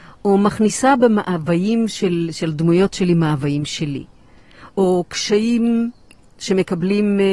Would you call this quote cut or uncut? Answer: uncut